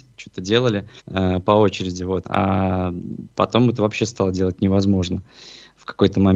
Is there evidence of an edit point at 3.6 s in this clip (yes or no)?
no